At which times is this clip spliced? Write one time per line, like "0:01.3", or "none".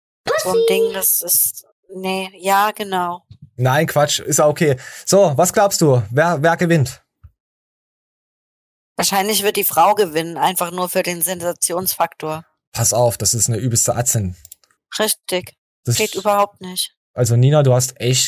0:14.8
0:15.9